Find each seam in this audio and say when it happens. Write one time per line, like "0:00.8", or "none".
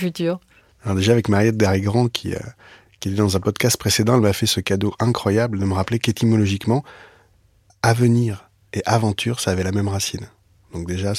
none

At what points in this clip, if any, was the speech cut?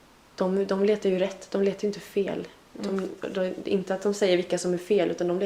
none

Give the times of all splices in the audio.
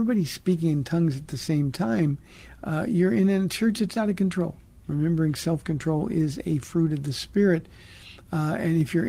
none

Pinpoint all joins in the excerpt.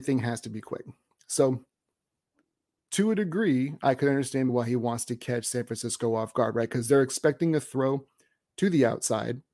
0:04.5

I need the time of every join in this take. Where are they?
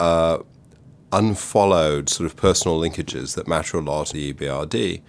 0:04.1

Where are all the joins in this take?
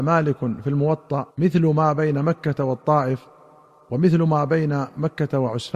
0:01.3

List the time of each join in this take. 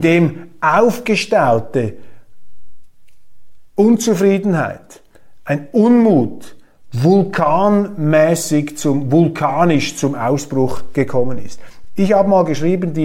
none

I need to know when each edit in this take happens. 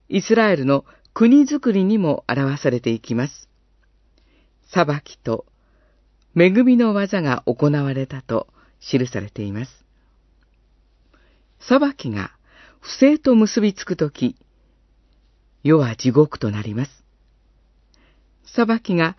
none

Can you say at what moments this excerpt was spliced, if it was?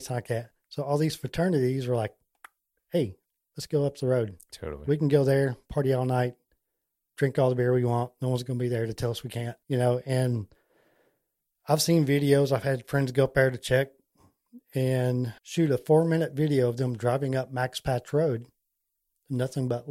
0:09.6
0:15.4

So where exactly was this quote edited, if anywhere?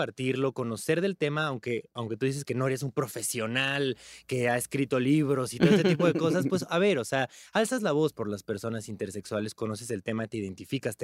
none

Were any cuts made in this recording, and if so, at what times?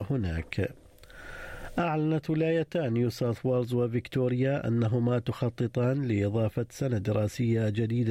0:01.8

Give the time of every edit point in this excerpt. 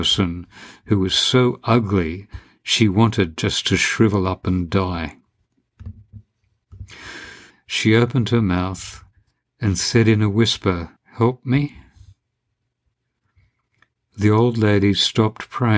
0:07.5
0:11.0

